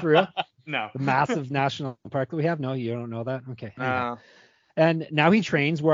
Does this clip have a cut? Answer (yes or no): no